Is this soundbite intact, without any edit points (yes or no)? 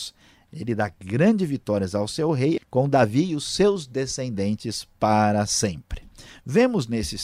no